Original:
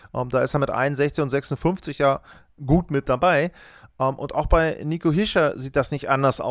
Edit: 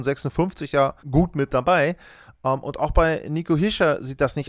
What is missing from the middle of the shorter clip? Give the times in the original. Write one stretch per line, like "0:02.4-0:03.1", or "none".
0:02.3-0:02.5